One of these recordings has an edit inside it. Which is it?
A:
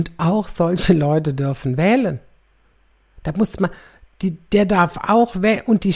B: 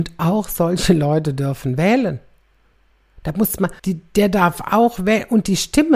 B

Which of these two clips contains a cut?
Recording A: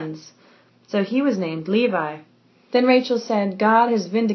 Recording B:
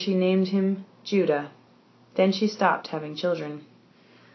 A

